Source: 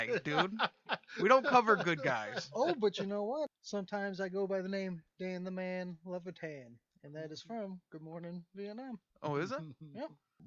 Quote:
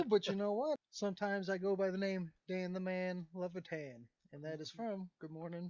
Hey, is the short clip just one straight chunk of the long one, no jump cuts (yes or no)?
yes